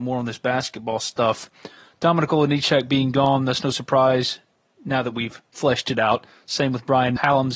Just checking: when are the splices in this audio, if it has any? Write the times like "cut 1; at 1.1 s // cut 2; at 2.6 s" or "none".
none